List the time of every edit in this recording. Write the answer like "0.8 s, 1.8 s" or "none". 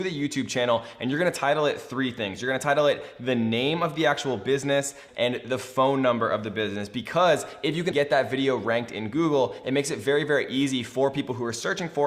5.1 s, 7.9 s